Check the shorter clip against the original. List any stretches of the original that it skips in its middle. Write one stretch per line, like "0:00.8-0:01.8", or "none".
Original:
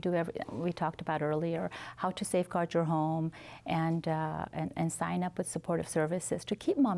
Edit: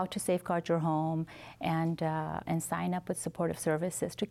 0:04.5-0:04.7